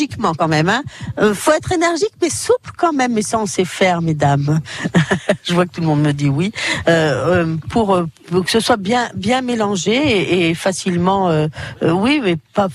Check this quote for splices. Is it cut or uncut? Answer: uncut